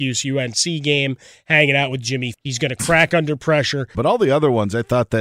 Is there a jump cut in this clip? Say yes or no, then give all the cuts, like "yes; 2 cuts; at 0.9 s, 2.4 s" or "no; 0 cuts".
yes; 2 cuts; at 2.3 s, 3.9 s